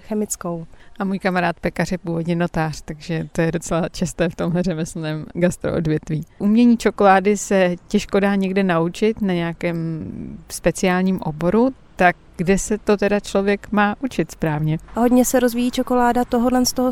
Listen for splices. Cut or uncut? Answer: cut